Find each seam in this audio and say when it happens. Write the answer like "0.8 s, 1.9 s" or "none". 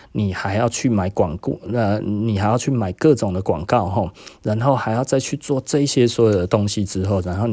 none